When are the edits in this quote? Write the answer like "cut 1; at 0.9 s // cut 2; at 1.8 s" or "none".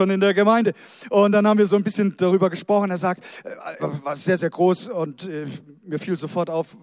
cut 1; at 3.8 s